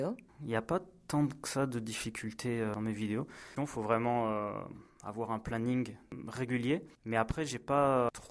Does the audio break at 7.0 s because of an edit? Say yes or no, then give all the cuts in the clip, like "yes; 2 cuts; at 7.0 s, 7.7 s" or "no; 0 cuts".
no; 1 cut; at 3.6 s